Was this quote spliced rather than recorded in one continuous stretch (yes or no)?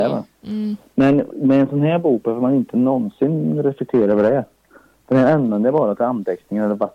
no